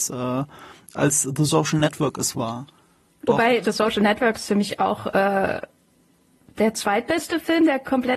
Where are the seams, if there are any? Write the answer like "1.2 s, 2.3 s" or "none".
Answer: 3.6 s